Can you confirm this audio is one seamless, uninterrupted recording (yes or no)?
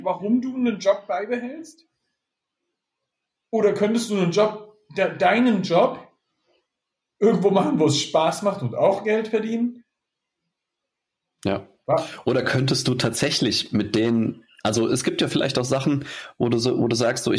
yes